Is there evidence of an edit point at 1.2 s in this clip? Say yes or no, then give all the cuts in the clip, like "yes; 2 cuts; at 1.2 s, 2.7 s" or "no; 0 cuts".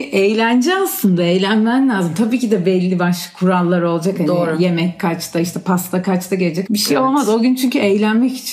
no; 1 cut; at 6.7 s